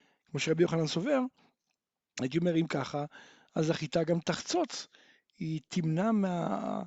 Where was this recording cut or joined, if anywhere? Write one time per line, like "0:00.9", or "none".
none